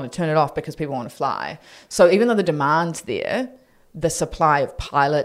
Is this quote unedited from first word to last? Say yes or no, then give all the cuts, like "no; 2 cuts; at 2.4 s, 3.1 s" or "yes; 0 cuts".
yes; 0 cuts